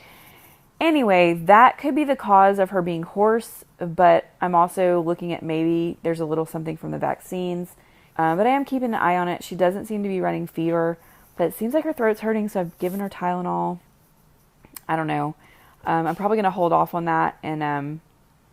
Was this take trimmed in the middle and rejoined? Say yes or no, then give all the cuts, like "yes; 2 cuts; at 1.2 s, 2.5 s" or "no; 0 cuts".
yes; 1 cut; at 8.1 s